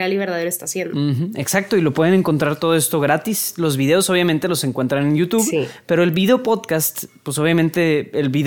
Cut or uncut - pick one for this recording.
uncut